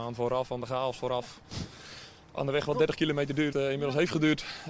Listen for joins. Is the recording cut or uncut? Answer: cut